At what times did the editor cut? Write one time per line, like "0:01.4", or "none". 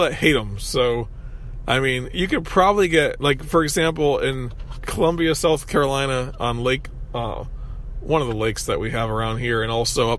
none

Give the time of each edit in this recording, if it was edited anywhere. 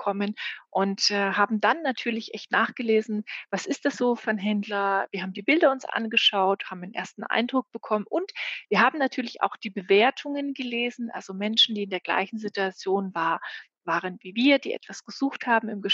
none

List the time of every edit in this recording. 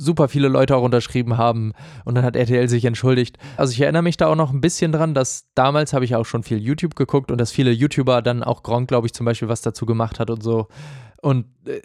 0:03.6

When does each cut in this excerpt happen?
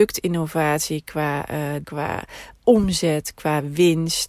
0:01.8

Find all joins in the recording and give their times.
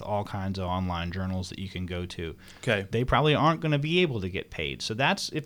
0:02.6

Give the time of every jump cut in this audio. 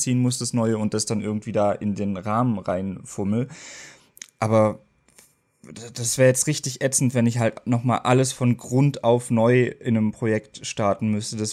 none

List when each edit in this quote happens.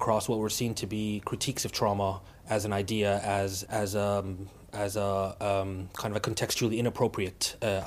0:03.7

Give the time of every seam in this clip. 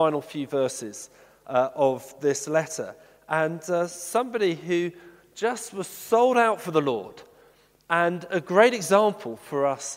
none

